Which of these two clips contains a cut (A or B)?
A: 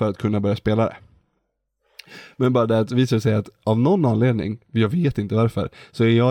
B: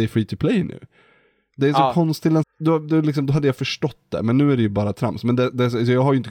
B